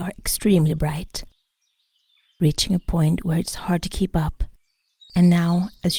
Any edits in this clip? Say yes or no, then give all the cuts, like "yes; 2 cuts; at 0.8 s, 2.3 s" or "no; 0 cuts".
yes; 1 cut; at 5.1 s